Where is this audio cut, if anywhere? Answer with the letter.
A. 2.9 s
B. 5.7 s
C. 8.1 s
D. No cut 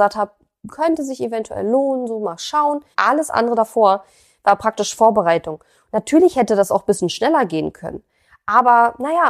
A